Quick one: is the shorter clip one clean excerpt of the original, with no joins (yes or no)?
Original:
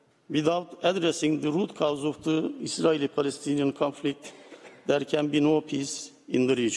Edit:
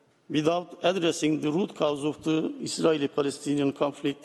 yes